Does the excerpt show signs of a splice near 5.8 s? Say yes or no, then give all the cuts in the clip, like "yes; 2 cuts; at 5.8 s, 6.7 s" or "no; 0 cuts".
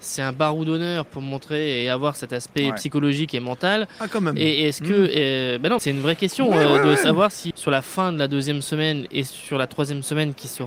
yes; 2 cuts; at 5.8 s, 7.5 s